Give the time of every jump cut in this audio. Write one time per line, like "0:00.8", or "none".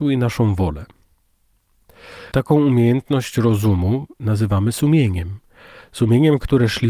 0:02.3